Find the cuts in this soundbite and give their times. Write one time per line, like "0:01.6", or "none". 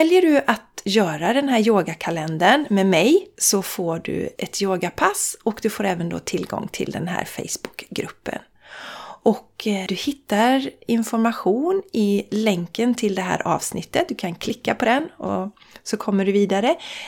none